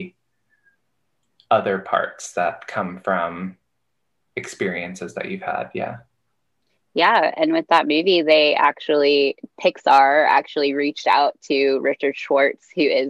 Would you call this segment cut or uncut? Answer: uncut